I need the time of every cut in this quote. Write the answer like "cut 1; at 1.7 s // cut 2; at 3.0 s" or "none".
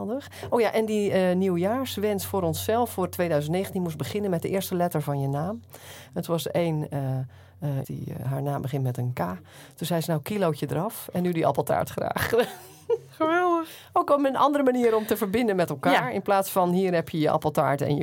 cut 1; at 7.8 s